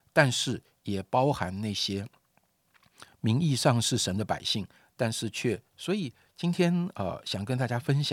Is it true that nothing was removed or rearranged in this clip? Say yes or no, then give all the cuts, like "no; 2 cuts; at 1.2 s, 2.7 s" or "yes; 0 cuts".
no; 1 cut; at 5.7 s